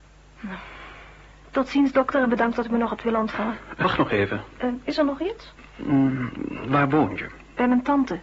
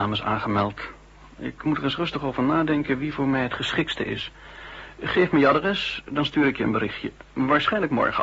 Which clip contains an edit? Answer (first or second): first